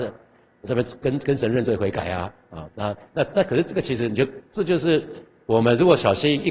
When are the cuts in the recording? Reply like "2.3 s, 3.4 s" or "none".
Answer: none